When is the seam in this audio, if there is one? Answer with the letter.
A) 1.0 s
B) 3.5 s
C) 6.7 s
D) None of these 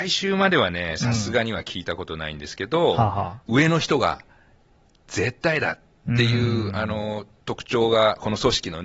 B